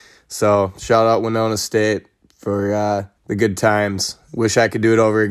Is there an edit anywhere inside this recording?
yes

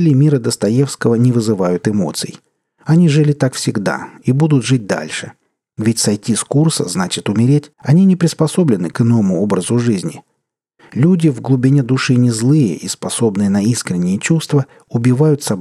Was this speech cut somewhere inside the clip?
yes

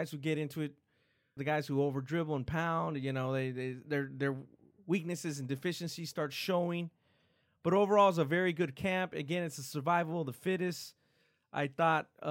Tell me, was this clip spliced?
yes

